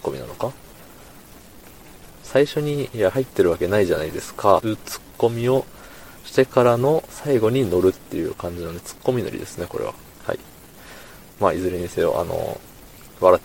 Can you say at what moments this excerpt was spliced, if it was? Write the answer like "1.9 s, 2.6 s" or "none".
4.6 s